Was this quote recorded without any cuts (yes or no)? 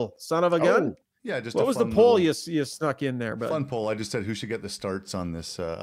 yes